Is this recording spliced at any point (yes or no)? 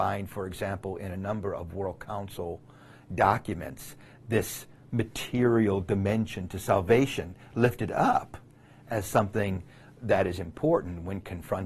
no